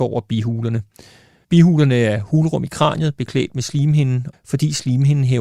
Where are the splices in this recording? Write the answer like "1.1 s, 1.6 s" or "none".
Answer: 1.4 s, 4.3 s

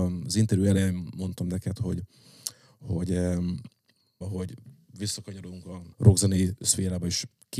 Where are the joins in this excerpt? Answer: 4.2 s, 5.9 s

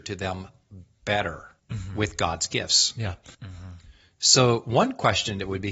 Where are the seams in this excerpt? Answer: 1.6 s, 3.3 s

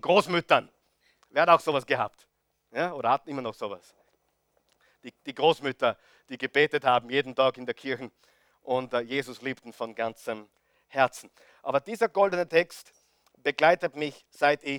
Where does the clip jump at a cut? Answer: none

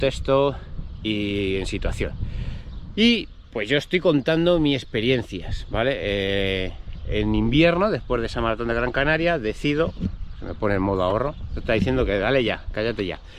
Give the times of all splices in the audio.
none

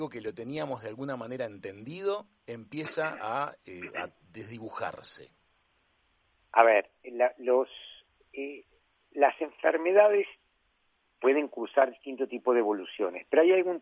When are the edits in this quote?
none

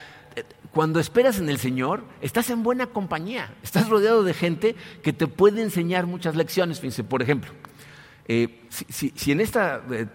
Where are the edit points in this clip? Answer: 8.7 s

